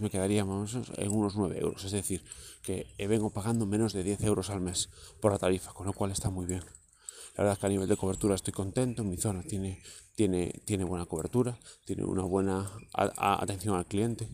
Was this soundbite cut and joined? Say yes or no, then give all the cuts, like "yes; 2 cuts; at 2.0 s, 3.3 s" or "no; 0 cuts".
no; 0 cuts